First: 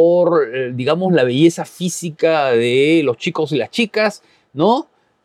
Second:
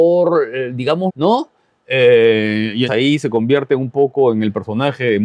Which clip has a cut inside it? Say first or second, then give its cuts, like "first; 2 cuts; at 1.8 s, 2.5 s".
second; 2 cuts; at 1.1 s, 2.9 s